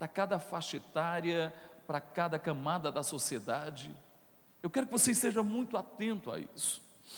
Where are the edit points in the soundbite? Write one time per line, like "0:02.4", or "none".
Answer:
0:04.4